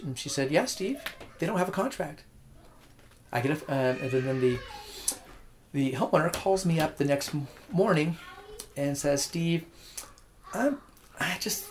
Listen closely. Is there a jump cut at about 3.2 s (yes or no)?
yes